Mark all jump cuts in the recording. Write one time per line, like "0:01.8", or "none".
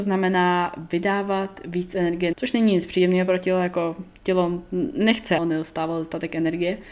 0:02.3
0:05.4